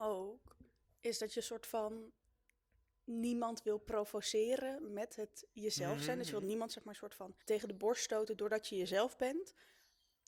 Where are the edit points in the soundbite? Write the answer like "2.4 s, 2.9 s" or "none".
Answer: 7.4 s